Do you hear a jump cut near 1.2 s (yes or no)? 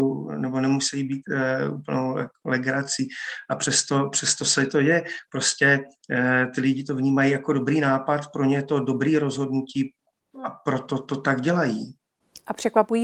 no